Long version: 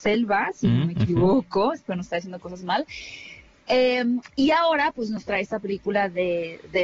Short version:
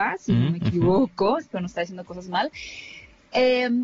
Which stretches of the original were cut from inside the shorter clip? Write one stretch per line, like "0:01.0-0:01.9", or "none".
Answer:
none